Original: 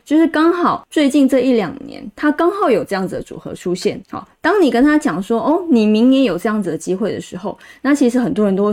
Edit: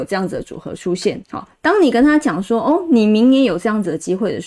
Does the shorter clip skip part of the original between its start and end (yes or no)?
no